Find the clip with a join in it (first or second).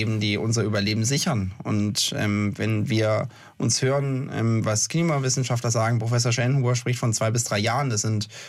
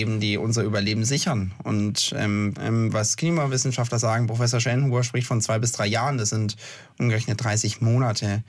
second